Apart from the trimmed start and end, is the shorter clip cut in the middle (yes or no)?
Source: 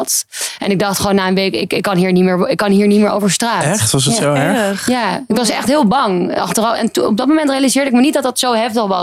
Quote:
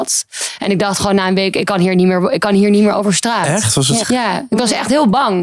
yes